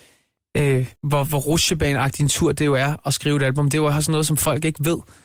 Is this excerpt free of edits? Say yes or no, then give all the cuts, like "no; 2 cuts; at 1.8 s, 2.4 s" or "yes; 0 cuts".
no; 1 cut; at 1.0 s